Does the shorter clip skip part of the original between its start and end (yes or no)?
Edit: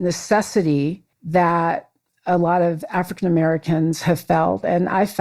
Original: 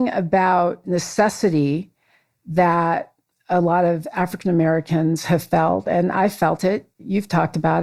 yes